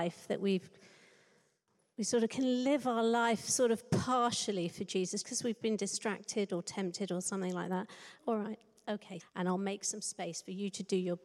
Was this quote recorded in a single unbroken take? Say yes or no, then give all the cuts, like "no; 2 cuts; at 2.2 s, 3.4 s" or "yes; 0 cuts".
no; 3 cuts; at 5.2 s, 8.2 s, 9.2 s